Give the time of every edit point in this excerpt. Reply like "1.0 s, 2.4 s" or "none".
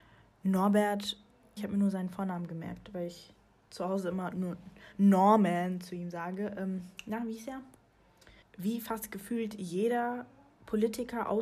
1.6 s, 8.4 s